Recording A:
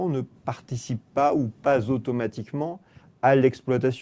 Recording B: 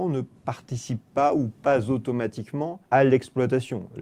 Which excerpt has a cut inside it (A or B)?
B